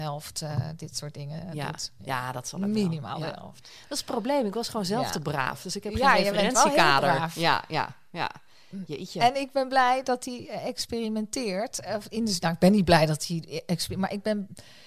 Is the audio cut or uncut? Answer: uncut